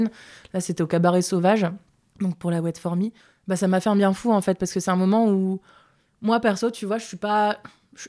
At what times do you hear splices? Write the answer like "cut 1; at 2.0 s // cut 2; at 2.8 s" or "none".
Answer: none

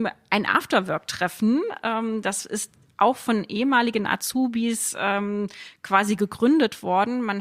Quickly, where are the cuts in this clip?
none

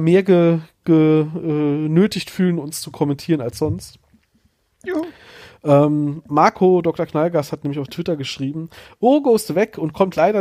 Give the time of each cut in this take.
none

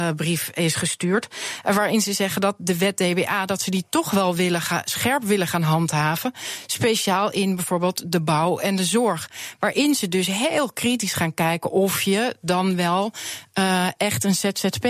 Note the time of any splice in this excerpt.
none

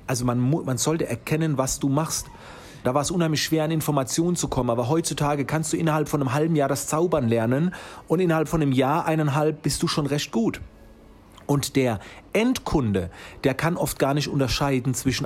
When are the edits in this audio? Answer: cut 1; at 2.8 s

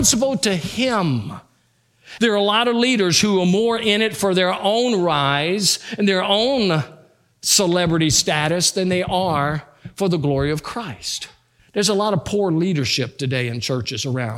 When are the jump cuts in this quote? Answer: cut 1; at 2.2 s // cut 2; at 11.6 s

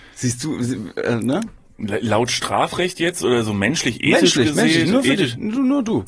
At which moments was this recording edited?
none

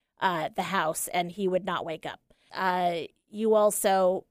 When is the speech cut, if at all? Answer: cut 1; at 2.5 s

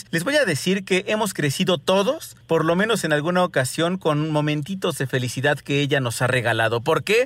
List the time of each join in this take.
none

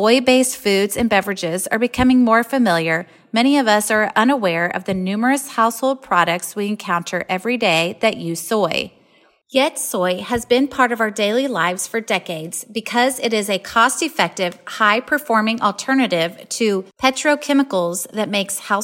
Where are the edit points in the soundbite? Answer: none

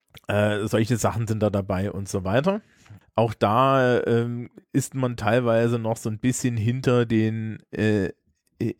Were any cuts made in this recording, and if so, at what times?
cut 1; at 3.0 s

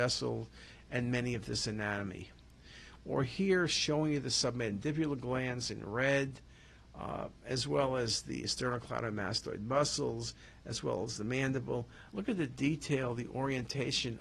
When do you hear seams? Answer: cut 1; at 3.0 s // cut 2; at 12.1 s

